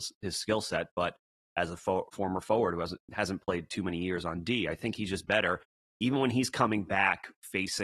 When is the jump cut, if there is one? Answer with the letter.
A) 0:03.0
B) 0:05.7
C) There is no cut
A